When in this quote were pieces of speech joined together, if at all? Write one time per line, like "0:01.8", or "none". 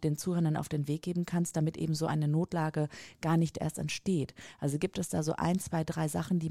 none